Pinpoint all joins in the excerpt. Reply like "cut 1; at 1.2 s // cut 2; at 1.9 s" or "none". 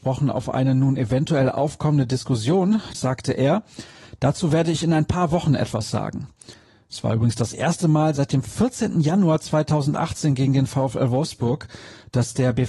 cut 1; at 2.9 s